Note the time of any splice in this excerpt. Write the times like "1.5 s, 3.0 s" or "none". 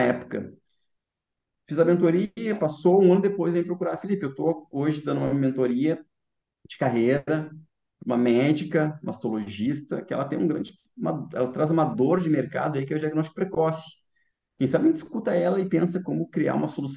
none